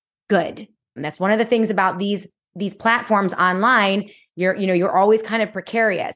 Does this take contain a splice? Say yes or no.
yes